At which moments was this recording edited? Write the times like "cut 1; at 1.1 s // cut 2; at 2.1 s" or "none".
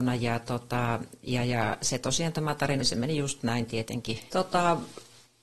cut 1; at 2.8 s // cut 2; at 4.3 s